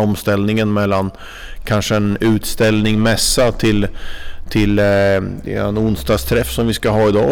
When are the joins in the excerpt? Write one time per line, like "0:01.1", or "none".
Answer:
none